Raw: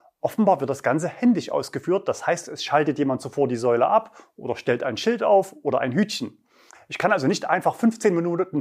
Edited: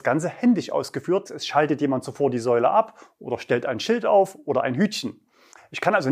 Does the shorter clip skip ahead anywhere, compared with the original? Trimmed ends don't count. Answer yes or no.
yes